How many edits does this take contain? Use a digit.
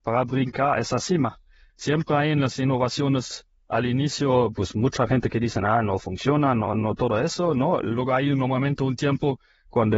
1